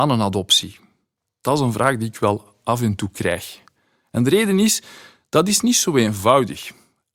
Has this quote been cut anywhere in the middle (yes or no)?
no